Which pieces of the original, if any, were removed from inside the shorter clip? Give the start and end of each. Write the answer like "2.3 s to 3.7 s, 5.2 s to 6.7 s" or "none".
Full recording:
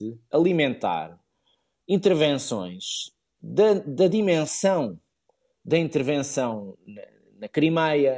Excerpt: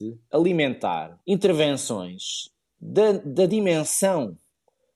1.2 s to 1.8 s